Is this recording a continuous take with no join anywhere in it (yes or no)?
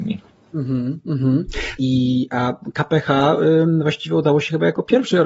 no